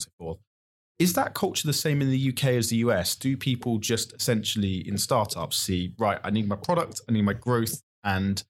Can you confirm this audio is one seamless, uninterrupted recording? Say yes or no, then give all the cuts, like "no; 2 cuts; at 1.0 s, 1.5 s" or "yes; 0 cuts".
yes; 0 cuts